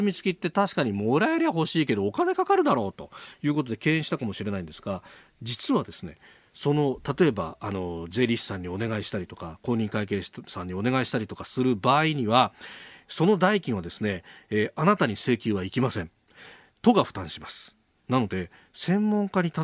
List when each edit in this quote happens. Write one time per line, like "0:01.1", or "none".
none